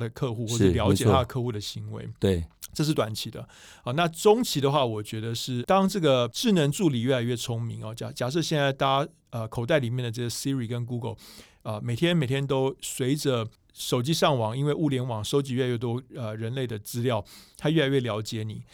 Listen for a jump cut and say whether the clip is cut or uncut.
uncut